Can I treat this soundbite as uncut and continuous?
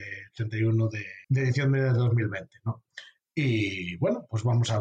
no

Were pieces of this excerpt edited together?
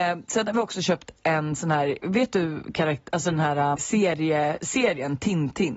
yes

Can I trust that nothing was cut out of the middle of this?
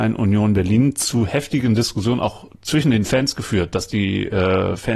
yes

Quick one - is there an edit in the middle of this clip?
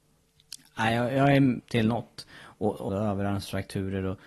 yes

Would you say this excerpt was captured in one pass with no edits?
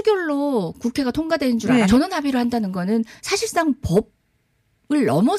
no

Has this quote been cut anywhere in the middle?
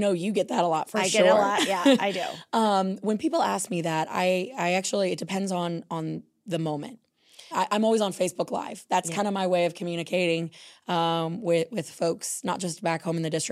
yes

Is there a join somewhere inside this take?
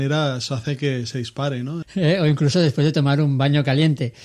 yes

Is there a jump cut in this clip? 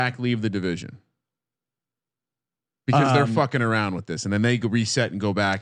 no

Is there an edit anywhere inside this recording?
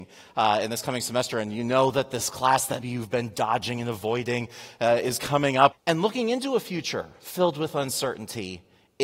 yes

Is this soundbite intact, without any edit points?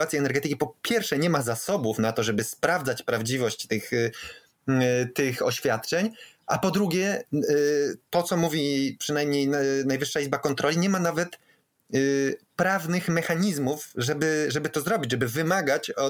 yes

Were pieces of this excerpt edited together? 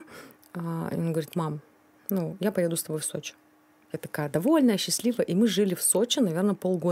no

